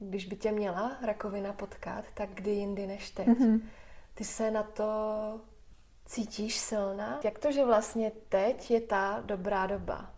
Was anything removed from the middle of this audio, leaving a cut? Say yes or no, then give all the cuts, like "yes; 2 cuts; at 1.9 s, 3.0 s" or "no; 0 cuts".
yes; 1 cut; at 7.2 s